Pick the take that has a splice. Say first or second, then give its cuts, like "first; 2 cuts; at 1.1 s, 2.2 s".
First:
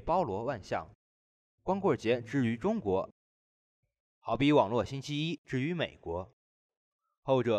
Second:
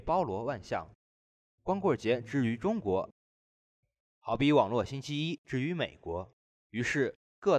second; 1 cut; at 6.5 s